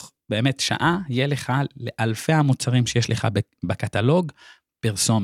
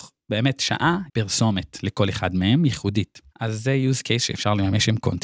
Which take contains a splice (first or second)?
second